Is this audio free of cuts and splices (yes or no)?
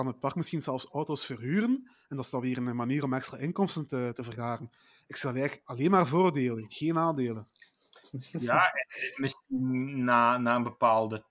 yes